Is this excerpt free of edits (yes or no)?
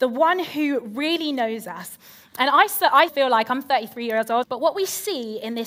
no